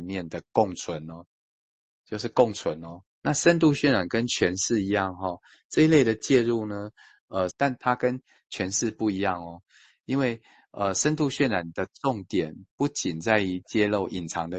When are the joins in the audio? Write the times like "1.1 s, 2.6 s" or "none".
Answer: 3.0 s, 7.5 s